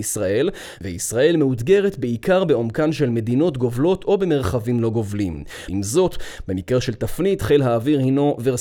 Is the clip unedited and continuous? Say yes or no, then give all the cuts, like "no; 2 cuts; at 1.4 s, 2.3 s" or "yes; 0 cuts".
no; 1 cut; at 5.7 s